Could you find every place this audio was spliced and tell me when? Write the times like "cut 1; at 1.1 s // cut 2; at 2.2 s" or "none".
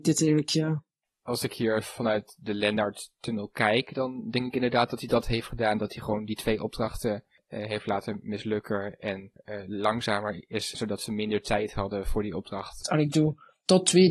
cut 1; at 10.7 s // cut 2; at 12.8 s